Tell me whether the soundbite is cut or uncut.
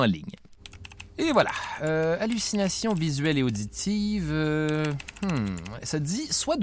uncut